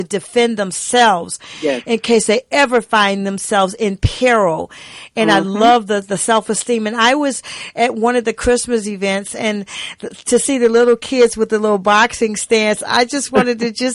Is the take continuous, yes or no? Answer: yes